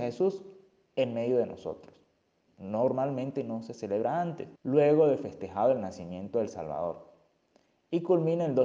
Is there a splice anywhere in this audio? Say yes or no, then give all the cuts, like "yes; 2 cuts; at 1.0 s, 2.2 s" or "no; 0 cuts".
yes; 2 cuts; at 2.5 s, 4.6 s